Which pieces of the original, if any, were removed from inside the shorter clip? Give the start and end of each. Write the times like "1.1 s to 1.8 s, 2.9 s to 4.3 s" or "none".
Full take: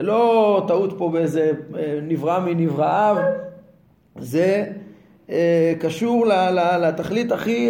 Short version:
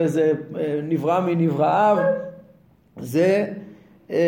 none